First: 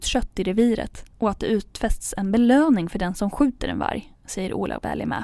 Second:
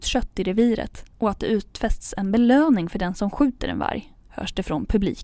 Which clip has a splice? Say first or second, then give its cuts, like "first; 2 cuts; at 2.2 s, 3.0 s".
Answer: second; 1 cut; at 4.2 s